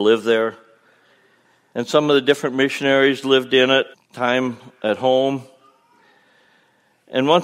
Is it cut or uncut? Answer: cut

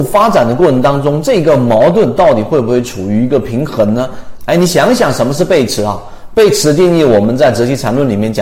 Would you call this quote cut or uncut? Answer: cut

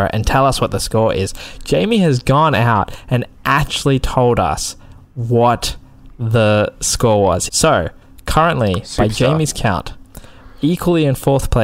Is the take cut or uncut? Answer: cut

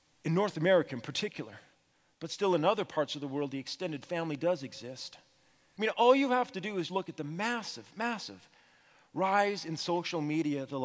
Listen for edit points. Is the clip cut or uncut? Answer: cut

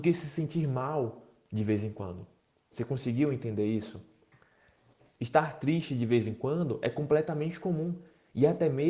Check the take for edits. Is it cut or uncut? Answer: cut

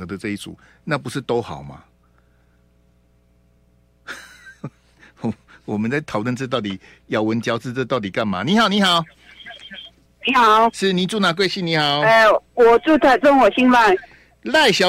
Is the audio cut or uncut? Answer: uncut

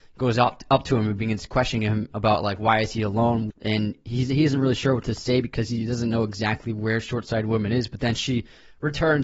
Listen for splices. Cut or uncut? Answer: cut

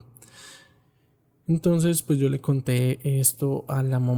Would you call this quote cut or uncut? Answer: uncut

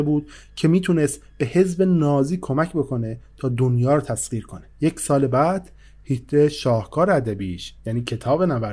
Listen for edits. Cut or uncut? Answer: cut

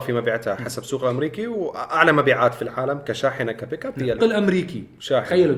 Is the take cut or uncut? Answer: cut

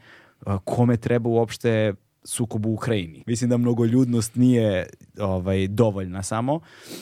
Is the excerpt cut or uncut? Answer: cut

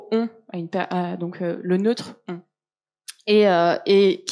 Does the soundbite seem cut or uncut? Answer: uncut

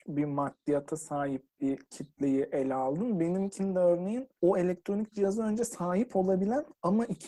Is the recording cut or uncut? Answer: cut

